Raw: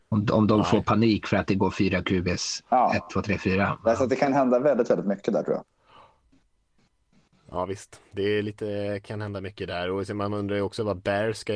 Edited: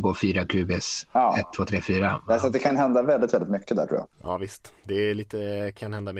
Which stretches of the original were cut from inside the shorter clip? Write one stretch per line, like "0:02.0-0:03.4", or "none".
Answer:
0:05.7-0:07.4